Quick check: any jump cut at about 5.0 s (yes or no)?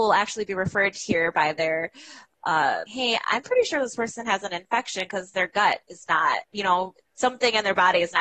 no